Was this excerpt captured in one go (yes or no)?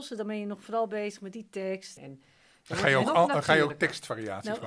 no